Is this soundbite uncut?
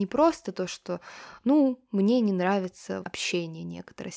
no; 1 cut; at 3.0 s

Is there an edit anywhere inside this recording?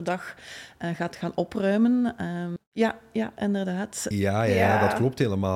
yes; 2 cuts; at 2.6 s, 4.1 s

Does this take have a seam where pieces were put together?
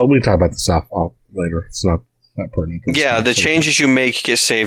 no; 0 cuts

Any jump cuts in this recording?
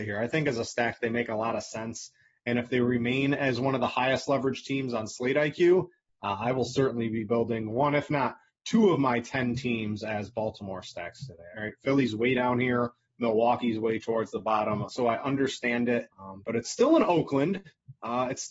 yes; 3 cuts; at 11.5 s, 14.9 s, 16.1 s

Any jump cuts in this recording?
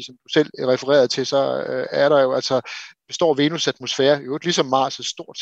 no; 0 cuts

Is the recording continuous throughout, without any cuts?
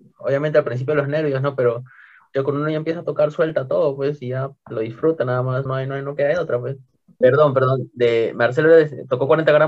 no; 2 cuts; at 5.7 s, 7.2 s

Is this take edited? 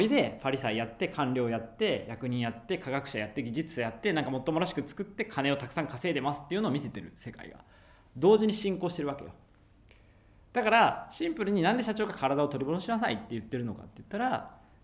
no; 0 cuts

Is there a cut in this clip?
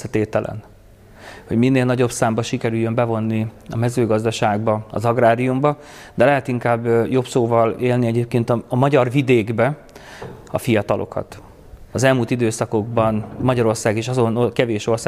yes; 1 cut; at 11.9 s

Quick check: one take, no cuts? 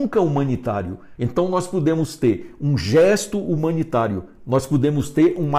no; 1 cut; at 1.2 s

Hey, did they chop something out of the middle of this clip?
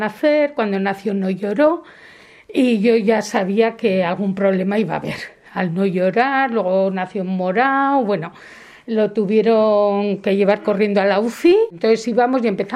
no; 0 cuts

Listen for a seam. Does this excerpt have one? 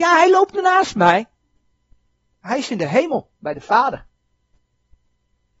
no; 0 cuts

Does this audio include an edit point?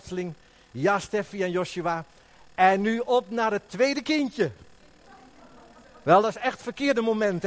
no; 0 cuts

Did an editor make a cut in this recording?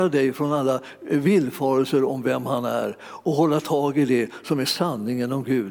no; 0 cuts

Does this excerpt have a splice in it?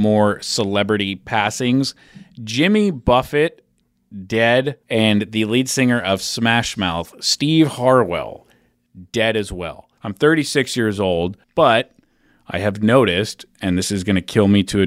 yes; 3 cuts; at 4.8 s, 10.0 s, 11.4 s

